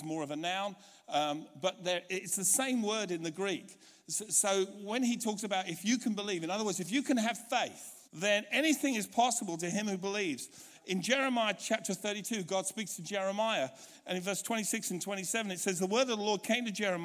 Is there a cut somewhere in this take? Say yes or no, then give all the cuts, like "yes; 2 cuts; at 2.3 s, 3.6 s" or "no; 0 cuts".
yes; 1 cut; at 8.0 s